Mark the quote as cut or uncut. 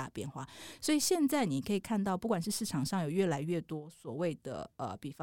uncut